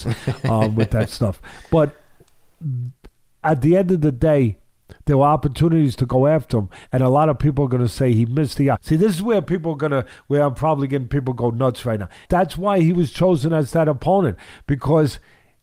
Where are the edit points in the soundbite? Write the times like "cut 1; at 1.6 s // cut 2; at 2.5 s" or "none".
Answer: cut 1; at 8.8 s // cut 2; at 12.3 s